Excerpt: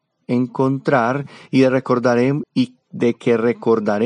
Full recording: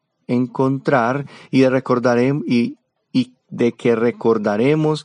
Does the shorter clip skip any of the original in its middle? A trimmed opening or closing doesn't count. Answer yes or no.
yes